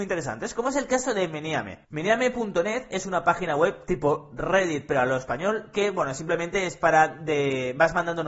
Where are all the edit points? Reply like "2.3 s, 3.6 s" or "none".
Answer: 1.8 s